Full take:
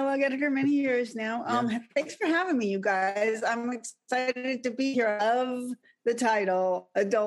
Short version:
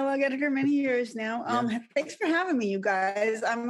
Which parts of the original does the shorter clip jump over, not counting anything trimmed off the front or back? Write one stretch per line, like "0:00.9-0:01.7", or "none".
none